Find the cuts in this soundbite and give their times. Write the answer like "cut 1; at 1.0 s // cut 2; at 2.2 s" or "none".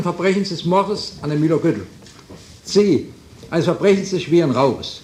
cut 1; at 2.6 s